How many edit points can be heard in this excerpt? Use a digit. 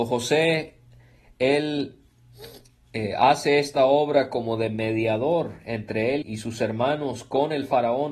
1